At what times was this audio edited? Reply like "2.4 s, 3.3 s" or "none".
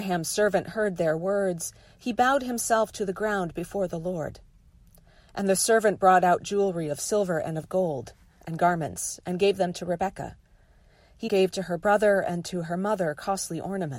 11.3 s